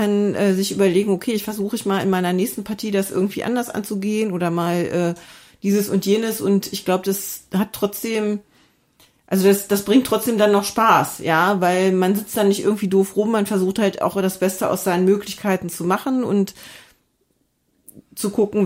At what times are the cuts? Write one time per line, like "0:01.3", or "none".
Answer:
none